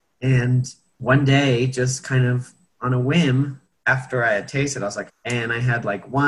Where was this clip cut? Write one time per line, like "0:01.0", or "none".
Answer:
0:05.1